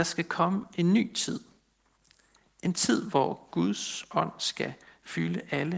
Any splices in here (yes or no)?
no